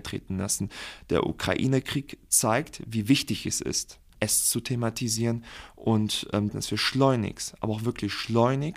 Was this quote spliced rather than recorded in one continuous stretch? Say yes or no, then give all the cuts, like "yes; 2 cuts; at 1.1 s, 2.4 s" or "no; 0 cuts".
yes; 2 cuts; at 4.1 s, 6.5 s